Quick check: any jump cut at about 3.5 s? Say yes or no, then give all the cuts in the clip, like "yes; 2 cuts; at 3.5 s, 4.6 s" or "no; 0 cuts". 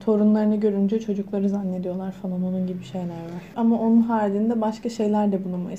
yes; 1 cut; at 3.5 s